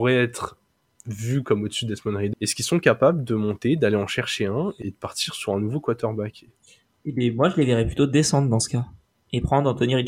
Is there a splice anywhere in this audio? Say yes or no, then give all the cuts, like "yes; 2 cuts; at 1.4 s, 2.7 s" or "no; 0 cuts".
yes; 2 cuts; at 2.3 s, 4.8 s